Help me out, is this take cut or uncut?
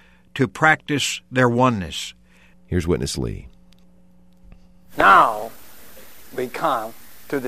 cut